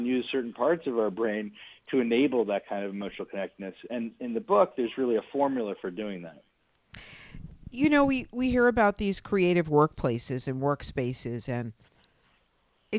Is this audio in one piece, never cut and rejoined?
yes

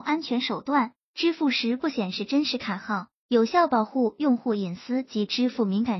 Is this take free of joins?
yes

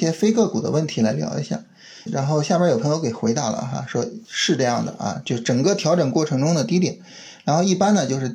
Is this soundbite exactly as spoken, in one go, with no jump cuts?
no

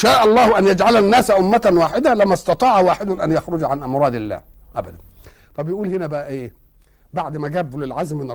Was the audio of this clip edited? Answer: no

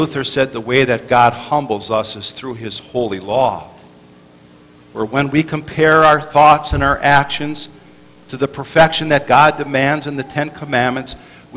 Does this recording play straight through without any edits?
yes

